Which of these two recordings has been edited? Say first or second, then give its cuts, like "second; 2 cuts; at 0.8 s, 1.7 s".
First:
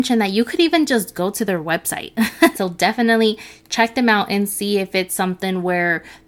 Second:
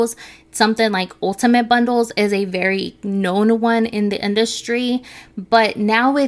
first; 1 cut; at 2.5 s